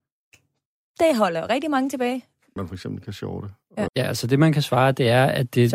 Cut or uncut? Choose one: cut